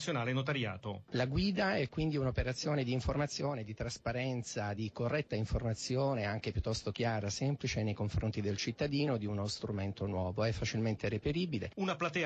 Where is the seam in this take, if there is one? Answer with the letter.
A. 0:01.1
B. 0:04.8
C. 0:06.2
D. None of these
D